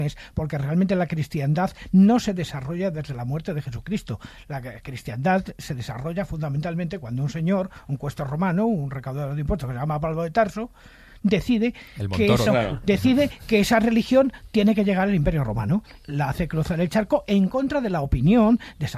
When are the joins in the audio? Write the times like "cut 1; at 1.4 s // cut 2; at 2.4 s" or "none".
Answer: cut 1; at 12.5 s // cut 2; at 16.0 s